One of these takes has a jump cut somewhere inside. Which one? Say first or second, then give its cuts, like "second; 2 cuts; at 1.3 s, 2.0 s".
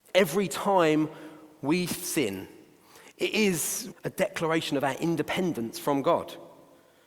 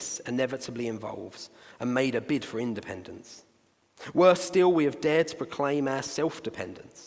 first; 1 cut; at 3.9 s